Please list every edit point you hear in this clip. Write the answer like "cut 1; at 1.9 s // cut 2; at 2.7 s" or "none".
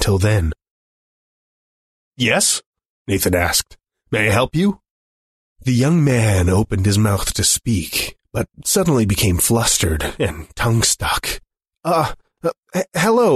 cut 1; at 12.4 s